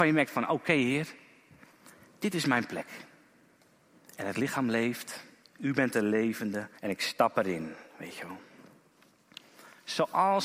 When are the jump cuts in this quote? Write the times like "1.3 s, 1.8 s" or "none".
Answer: 6.8 s